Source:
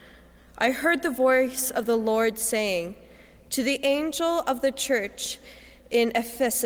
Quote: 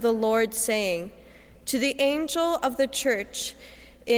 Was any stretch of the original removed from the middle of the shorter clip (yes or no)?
no